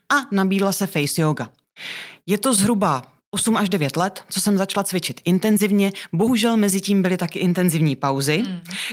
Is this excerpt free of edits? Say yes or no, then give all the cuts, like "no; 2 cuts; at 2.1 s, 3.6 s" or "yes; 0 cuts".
yes; 0 cuts